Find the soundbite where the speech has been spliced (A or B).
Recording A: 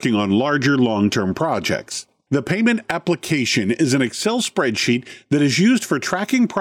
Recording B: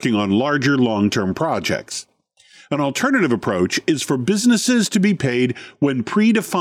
A